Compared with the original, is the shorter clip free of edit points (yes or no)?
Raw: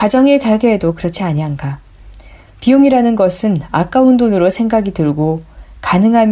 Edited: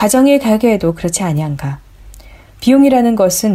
yes